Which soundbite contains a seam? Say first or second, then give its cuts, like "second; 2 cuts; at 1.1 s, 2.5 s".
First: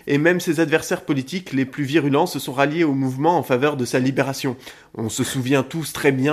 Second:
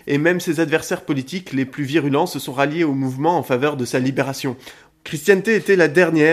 second; 1 cut; at 4.9 s